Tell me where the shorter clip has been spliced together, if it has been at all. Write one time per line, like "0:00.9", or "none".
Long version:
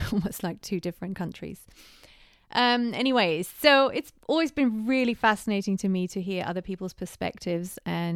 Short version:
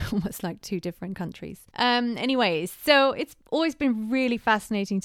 0:01.7